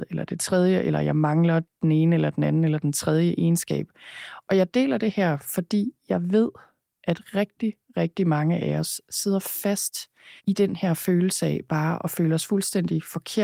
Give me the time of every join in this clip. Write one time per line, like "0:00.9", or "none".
0:10.4